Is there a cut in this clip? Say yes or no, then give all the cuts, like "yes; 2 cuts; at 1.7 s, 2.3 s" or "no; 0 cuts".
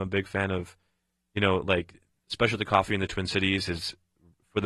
no; 0 cuts